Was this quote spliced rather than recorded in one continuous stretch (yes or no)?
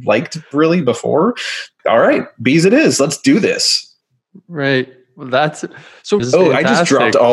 yes